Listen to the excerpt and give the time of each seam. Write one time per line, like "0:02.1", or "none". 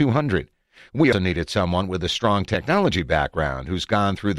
0:01.1